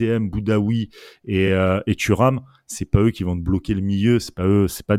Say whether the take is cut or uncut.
uncut